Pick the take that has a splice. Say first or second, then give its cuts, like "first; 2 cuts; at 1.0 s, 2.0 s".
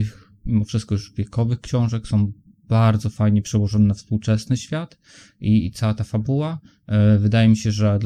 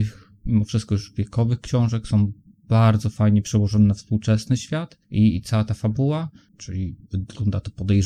second; 2 cuts; at 5.0 s, 6.5 s